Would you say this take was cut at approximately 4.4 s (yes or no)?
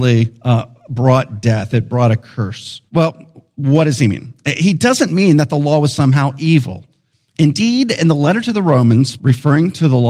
no